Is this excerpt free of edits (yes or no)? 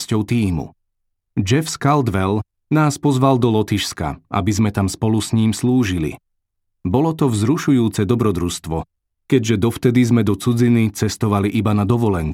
no